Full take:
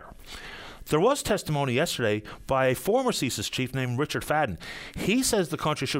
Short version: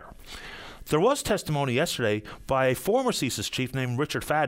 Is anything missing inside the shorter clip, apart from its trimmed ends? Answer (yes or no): no